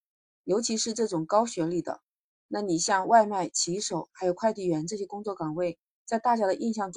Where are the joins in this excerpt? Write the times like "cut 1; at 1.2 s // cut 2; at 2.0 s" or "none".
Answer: none